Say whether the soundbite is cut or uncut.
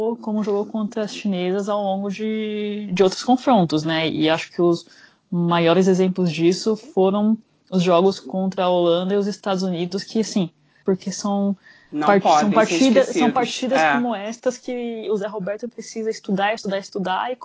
cut